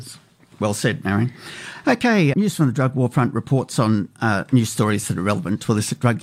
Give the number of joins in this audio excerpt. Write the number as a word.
one